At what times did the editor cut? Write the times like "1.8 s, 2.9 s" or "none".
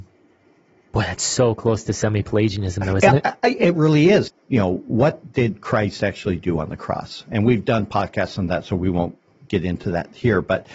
4.3 s